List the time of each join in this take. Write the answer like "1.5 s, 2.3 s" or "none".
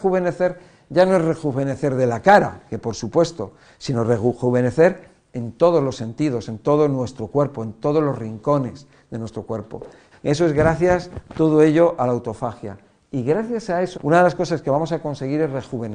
10.1 s, 13.9 s